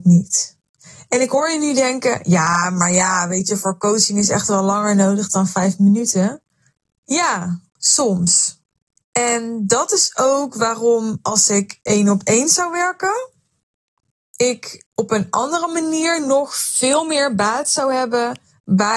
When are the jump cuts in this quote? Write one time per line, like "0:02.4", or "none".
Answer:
0:14.9